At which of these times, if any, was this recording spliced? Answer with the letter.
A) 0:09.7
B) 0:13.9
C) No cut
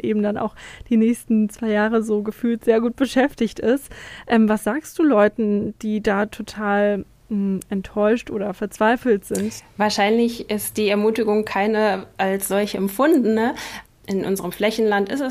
B